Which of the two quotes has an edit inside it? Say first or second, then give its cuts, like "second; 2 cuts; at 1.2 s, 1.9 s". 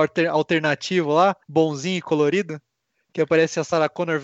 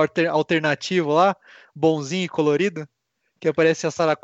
first; 1 cut; at 1.4 s